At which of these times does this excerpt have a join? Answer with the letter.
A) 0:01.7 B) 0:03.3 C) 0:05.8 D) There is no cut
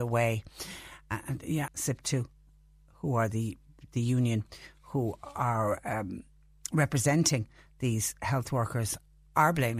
A